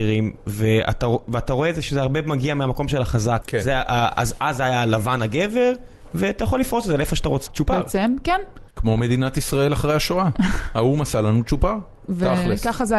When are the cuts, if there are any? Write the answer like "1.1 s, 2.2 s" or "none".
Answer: 3.4 s, 7.5 s, 8.7 s